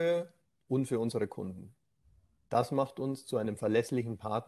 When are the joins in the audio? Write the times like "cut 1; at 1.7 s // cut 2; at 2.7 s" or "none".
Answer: none